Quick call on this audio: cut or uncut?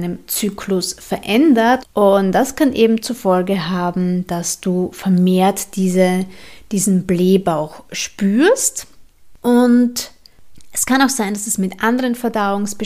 cut